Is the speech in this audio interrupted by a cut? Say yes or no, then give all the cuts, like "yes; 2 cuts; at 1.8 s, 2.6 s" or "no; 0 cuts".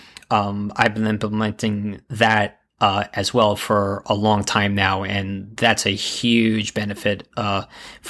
no; 0 cuts